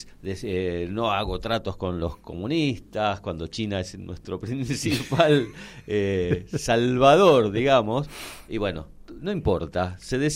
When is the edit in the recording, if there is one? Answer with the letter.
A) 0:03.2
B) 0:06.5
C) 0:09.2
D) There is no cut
D